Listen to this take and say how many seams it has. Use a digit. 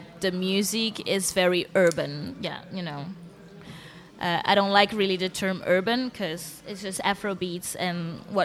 1